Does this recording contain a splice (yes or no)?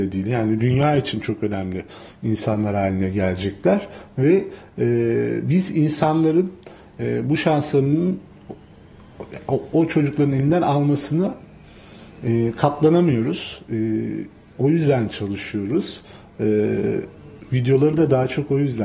no